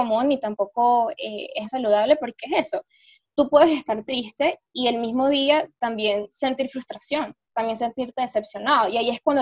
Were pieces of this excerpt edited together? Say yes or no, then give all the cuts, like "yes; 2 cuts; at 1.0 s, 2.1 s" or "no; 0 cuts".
yes; 1 cut; at 1.6 s